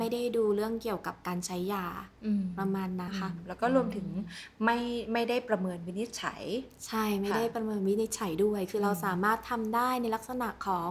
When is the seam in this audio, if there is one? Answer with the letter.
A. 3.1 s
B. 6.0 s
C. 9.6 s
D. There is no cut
A